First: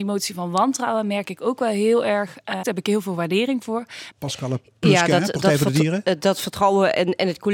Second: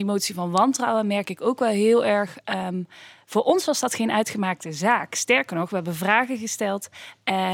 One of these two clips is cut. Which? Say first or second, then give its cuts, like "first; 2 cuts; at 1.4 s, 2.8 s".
first; 2 cuts; at 2.6 s, 4.1 s